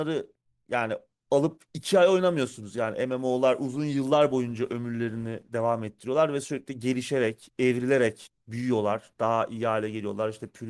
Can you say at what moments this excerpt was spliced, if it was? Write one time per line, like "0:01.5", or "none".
0:08.4